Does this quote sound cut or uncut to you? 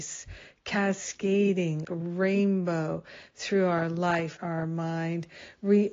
cut